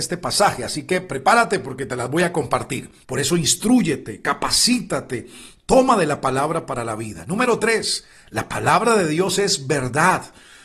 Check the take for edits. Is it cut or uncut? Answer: cut